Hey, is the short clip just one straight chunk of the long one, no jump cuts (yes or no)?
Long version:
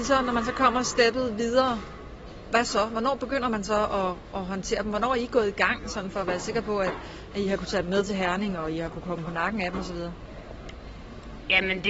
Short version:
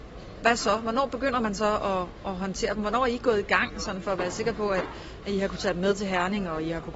yes